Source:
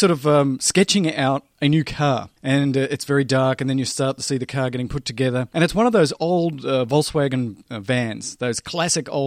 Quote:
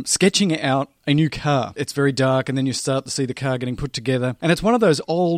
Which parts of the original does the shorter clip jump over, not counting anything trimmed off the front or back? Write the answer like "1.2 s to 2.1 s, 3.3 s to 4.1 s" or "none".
2.3 s to 2.9 s